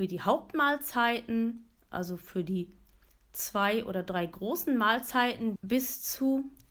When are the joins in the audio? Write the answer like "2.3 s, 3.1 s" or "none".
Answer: 5.6 s

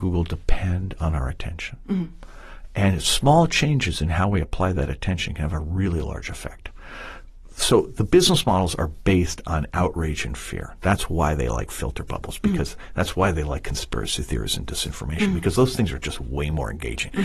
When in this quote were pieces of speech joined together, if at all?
none

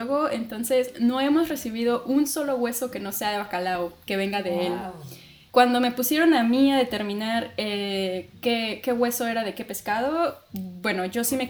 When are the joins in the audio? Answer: 5.5 s

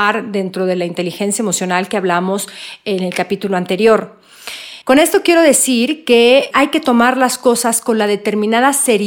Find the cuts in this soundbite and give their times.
4.8 s, 6.5 s

